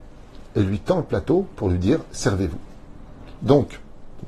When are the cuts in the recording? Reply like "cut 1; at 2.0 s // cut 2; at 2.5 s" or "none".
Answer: cut 1; at 3.4 s